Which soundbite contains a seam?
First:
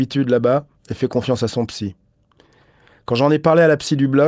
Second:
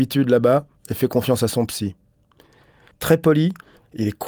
second; 1 cut; at 2.9 s

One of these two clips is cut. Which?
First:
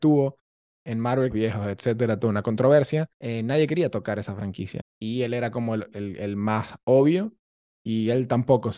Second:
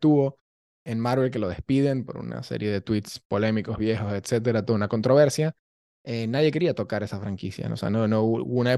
first; 3 cuts; at 1.3 s, 3.2 s, 4.8 s

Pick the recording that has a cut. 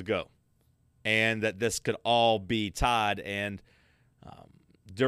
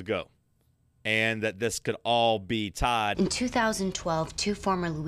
second; 1 cut; at 3.1 s

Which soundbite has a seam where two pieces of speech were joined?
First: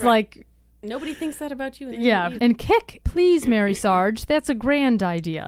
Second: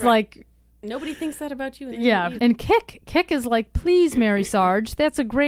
first; 1 cut; at 3.0 s

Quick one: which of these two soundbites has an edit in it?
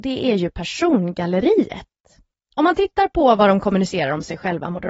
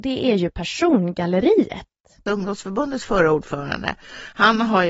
second; 1 cut; at 2.3 s

